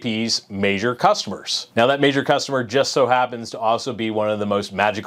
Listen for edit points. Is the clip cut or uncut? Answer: cut